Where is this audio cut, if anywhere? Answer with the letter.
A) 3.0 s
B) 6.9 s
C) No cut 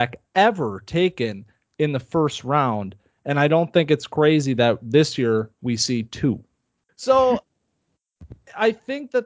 B